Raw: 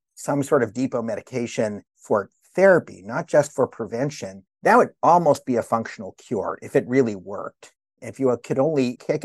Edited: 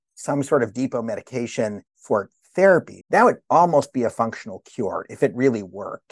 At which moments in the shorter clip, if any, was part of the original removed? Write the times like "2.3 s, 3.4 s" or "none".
3.0 s